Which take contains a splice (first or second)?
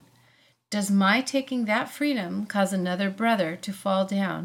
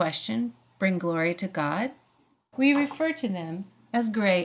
second